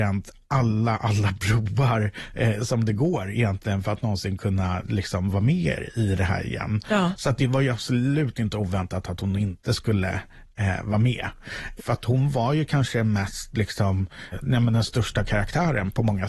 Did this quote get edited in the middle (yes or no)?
yes